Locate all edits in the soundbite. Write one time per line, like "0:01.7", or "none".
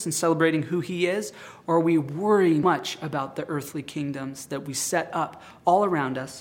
0:02.6